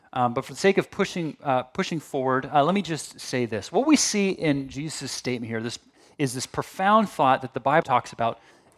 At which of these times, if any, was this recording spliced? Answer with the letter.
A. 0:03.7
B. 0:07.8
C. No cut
B